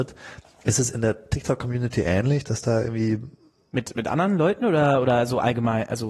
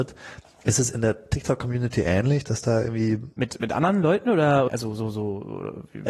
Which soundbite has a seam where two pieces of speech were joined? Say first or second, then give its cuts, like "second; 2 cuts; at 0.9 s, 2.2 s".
second; 2 cuts; at 3.3 s, 4.7 s